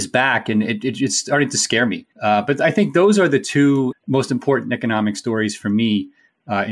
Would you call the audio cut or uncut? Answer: cut